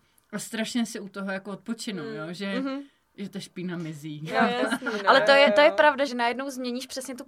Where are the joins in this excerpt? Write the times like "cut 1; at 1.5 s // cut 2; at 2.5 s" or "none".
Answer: cut 1; at 6.1 s